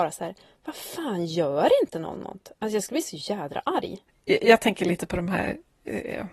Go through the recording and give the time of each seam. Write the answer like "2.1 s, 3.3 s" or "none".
none